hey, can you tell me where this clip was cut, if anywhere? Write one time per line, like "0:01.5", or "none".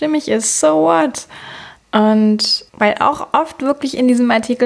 0:01.8